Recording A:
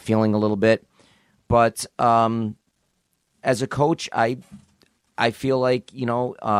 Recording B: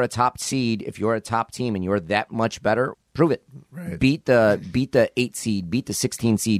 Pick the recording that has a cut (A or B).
B